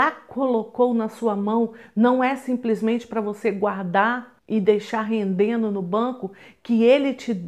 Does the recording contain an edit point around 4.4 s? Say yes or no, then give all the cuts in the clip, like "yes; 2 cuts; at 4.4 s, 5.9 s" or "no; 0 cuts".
yes; 1 cut; at 4.4 s